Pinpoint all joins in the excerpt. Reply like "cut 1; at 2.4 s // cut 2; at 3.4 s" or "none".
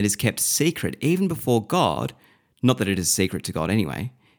none